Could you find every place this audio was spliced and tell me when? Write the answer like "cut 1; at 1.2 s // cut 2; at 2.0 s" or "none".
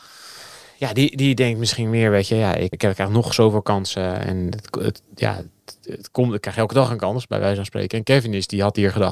cut 1; at 2.7 s